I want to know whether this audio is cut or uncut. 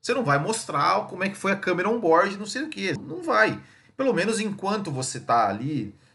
cut